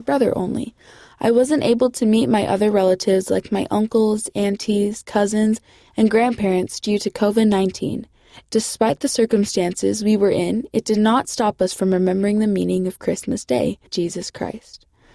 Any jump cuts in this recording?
yes; 2 cuts; at 8.4 s, 13.9 s

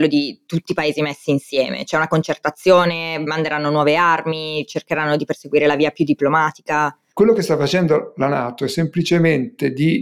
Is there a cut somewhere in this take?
yes; 1 cut; at 7.1 s

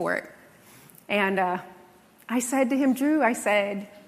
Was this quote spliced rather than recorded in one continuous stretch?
no; 0 cuts

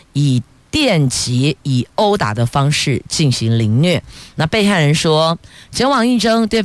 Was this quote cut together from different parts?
no; 0 cuts

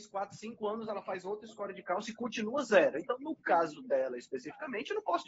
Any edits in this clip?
no; 0 cuts

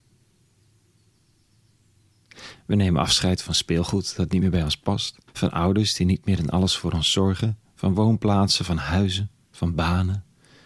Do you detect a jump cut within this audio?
yes; 2 cuts; at 2.6 s, 5.3 s

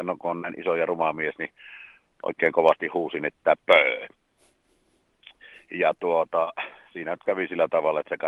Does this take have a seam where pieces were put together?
no; 0 cuts

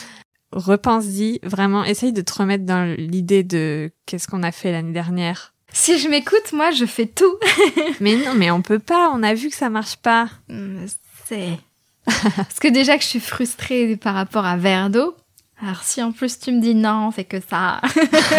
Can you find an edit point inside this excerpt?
no; 0 cuts

